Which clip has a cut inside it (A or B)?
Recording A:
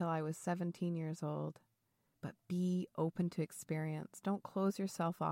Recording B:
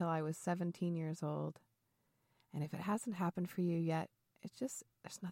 A